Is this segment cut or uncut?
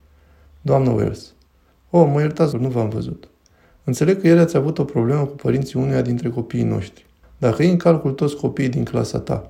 cut